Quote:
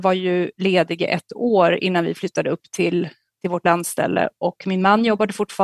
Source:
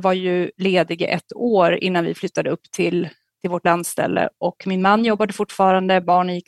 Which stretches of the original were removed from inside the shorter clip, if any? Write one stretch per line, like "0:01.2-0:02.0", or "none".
none